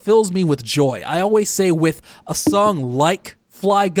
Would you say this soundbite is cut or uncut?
uncut